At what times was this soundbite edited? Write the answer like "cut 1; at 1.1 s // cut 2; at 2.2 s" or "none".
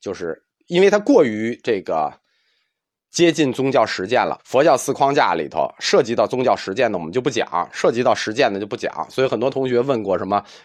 cut 1; at 4.4 s